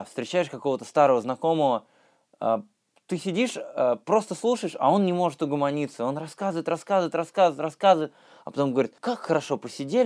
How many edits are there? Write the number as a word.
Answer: one